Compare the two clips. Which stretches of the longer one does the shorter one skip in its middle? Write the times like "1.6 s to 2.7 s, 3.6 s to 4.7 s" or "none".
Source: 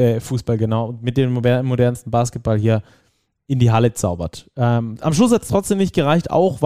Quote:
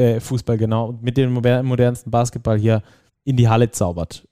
3.1 s to 3.3 s